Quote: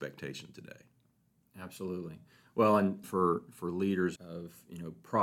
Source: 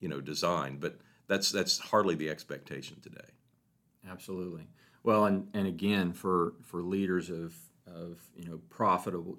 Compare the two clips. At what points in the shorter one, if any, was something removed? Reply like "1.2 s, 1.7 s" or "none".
3.0 s, 4.2 s